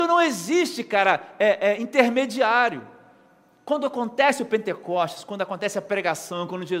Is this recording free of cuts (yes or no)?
yes